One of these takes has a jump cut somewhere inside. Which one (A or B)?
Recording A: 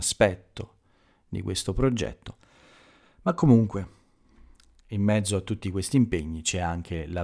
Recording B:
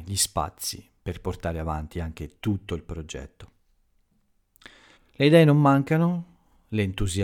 B